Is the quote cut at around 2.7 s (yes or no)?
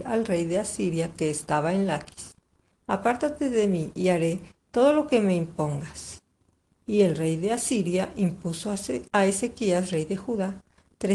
yes